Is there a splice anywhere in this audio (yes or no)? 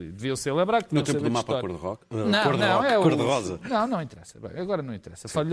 no